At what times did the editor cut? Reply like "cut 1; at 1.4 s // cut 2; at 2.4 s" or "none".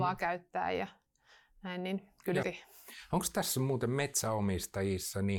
cut 1; at 2.4 s